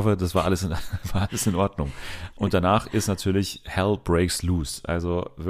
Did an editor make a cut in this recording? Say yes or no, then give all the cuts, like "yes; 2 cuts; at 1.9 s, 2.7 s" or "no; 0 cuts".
no; 0 cuts